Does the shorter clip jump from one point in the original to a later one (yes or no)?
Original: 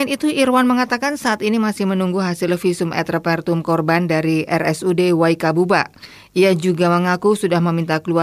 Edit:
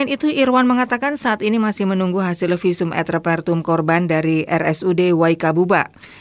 no